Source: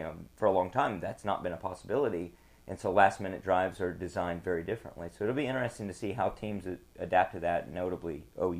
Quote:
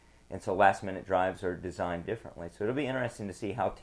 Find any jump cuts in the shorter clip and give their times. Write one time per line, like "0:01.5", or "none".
0:02.0